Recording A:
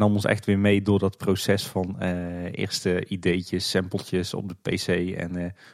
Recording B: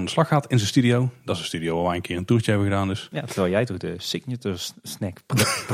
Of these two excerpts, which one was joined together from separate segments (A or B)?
B